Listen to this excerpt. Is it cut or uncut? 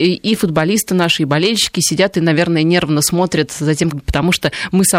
cut